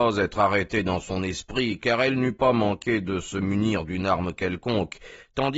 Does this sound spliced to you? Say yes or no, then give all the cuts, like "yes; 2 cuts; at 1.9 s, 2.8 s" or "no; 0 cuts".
no; 0 cuts